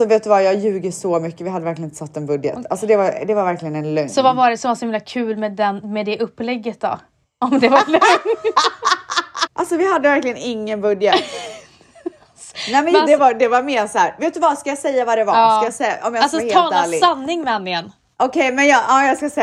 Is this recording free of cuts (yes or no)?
no